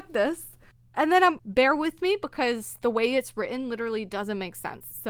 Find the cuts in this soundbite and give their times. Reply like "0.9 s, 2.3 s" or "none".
1.4 s